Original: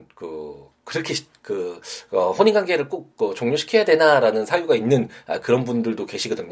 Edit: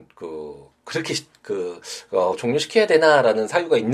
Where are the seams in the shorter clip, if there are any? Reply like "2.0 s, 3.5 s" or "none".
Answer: 2.3 s